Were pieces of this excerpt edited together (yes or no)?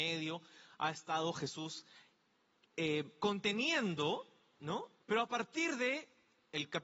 yes